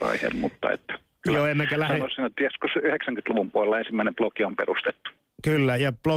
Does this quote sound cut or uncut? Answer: uncut